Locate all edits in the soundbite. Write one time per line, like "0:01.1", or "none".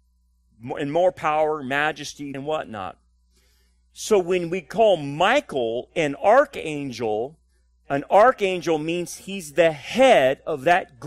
0:02.3